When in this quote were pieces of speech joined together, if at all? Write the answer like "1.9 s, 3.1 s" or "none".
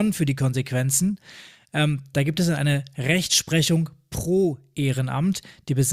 none